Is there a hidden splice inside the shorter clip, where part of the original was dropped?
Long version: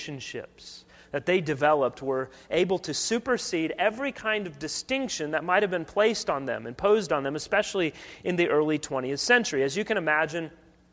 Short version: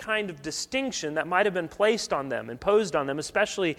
no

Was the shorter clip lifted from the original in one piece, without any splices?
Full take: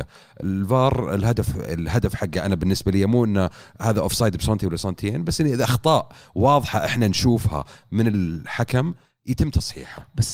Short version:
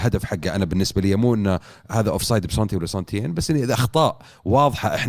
yes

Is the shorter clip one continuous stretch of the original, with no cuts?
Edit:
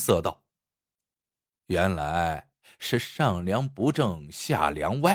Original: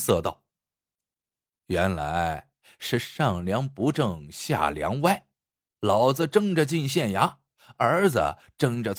yes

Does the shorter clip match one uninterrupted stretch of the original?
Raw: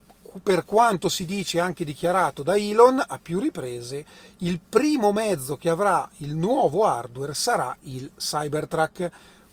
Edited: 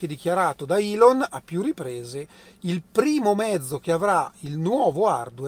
yes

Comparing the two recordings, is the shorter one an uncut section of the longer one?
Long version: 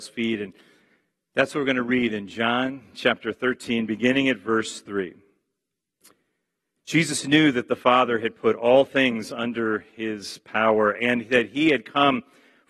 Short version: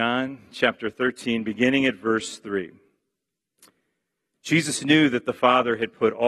yes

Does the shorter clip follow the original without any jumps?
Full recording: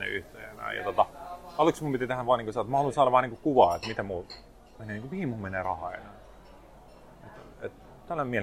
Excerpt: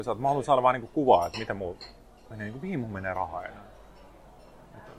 yes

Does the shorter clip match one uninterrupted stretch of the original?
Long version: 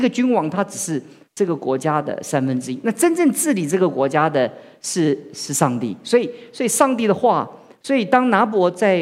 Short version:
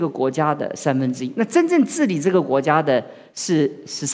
yes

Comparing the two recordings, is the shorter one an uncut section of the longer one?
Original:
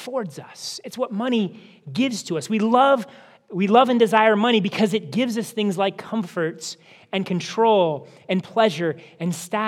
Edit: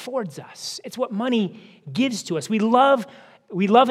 yes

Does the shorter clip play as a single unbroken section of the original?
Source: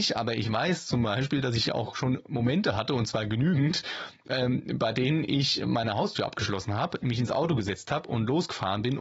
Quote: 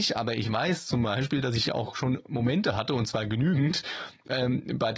yes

